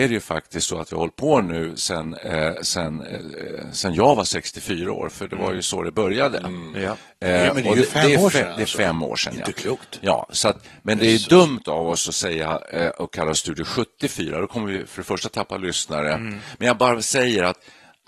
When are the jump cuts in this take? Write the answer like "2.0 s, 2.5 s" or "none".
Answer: none